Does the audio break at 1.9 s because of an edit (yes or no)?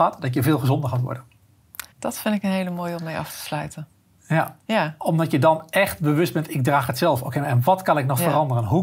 yes